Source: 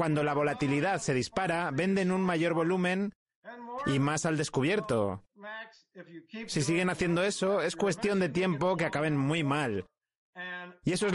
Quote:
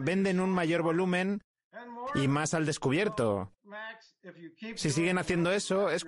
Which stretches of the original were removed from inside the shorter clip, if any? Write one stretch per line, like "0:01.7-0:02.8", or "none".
none